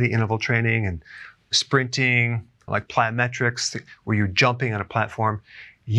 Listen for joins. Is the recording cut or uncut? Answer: cut